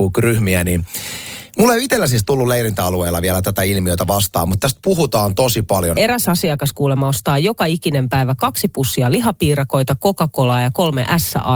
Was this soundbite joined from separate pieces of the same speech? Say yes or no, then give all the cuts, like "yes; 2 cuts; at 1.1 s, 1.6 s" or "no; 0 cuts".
yes; 1 cut; at 5.9 s